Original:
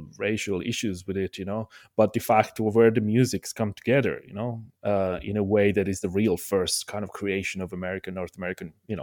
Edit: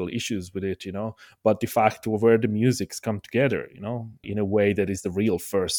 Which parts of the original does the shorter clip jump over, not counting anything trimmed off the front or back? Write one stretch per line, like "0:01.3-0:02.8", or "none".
0:04.8-0:05.2